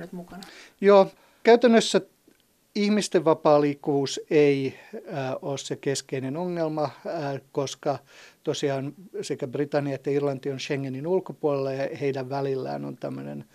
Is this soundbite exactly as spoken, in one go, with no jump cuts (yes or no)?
yes